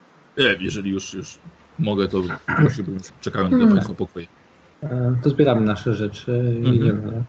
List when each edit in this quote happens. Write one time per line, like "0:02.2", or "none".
0:03.1